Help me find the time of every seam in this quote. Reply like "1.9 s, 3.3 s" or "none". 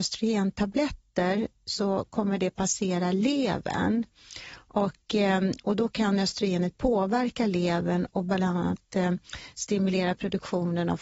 none